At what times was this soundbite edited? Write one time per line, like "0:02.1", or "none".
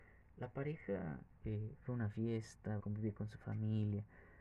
0:02.8